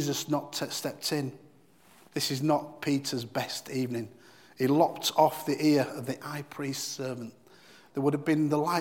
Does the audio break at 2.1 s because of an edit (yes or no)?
yes